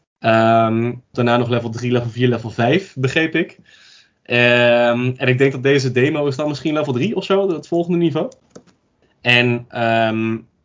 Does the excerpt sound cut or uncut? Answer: cut